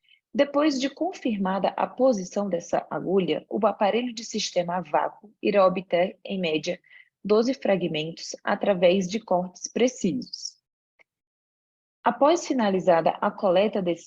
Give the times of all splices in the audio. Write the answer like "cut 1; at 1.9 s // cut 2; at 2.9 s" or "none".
none